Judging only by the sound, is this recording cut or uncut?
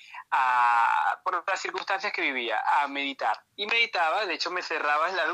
cut